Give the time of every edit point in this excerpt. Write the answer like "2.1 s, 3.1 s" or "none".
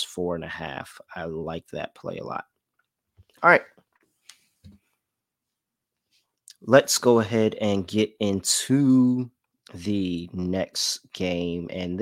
none